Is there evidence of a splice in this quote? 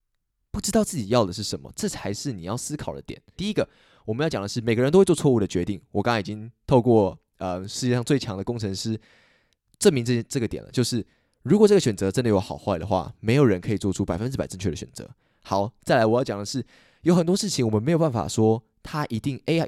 yes; 1 cut; at 3.4 s

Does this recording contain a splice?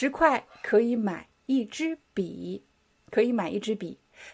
no; 0 cuts

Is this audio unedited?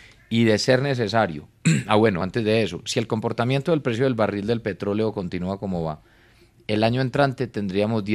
yes; 0 cuts

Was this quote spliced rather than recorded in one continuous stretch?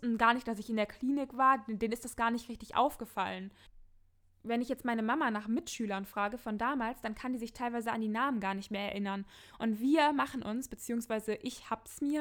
no; 0 cuts

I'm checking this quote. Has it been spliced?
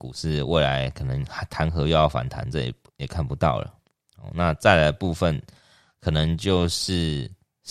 no; 0 cuts

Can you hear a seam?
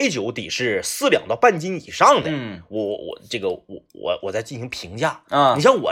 no; 0 cuts

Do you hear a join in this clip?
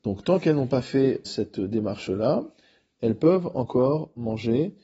yes; 1 cut; at 1.2 s

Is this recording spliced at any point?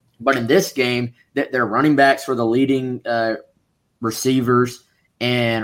no; 0 cuts

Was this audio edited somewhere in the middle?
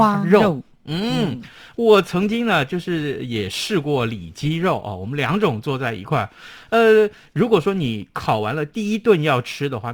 no; 0 cuts

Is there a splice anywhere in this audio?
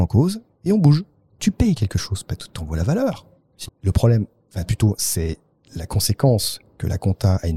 yes; 2 cuts; at 1.4 s, 3.7 s

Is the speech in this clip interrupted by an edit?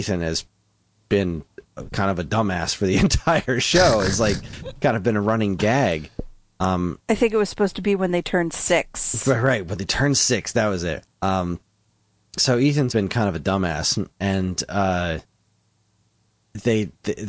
yes; 2 cuts; at 11.1 s, 12.9 s

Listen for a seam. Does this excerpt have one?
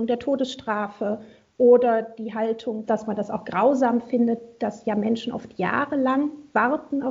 yes; 1 cut; at 2.8 s

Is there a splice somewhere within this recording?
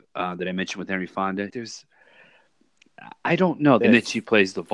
yes; 2 cuts; at 1.5 s, 3.8 s

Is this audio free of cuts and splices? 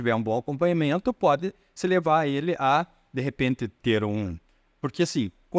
yes; 0 cuts

